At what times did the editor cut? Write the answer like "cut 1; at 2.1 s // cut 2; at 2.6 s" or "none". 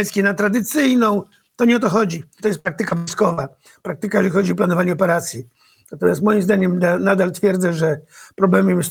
cut 1; at 2.4 s